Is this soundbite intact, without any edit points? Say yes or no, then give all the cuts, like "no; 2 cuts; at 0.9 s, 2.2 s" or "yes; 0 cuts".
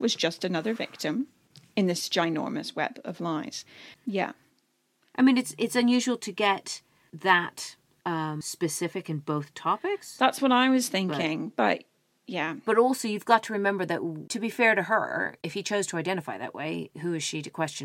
no; 1 cut; at 3.9 s